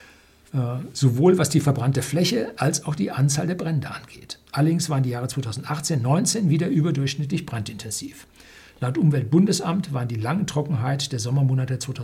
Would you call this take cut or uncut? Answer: uncut